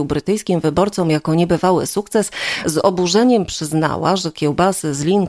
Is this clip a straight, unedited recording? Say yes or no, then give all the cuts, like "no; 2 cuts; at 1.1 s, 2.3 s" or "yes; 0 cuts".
yes; 0 cuts